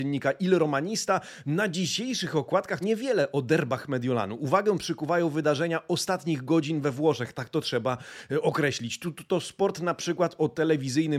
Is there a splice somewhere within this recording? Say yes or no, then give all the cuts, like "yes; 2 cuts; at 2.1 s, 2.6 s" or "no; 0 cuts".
yes; 1 cut; at 2.8 s